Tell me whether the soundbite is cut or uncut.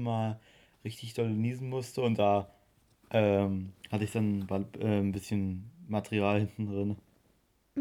uncut